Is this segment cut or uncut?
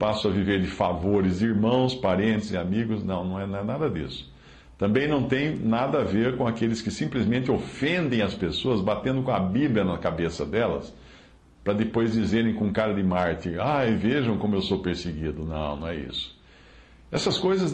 uncut